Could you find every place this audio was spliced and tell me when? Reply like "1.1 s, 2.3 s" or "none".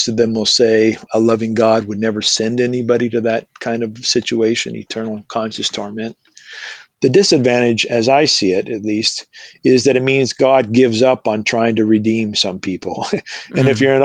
6.9 s